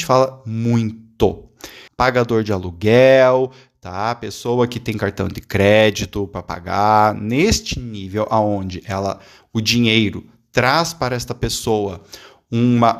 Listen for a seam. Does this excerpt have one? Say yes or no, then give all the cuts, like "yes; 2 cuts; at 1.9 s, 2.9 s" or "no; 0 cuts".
yes; 1 cut; at 1.9 s